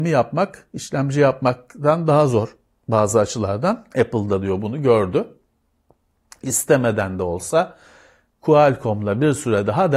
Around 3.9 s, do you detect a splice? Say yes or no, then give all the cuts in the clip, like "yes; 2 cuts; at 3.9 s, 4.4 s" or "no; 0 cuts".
yes; 1 cut; at 3.9 s